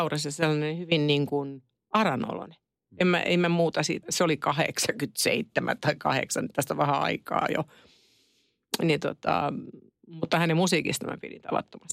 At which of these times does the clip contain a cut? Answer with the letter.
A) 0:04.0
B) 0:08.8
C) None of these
A